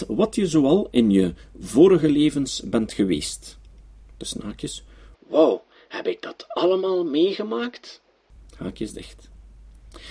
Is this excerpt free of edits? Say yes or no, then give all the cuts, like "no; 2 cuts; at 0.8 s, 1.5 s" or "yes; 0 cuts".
yes; 0 cuts